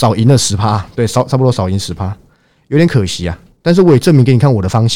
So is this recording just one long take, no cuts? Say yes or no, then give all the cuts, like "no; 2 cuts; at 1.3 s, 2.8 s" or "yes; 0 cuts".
yes; 0 cuts